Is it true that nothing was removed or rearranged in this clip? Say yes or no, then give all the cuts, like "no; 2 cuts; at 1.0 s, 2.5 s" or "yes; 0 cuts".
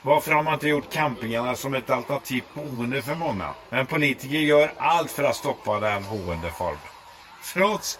no; 1 cut; at 3.7 s